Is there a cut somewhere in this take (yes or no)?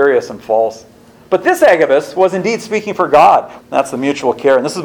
yes